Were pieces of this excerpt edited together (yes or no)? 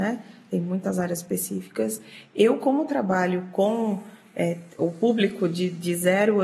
no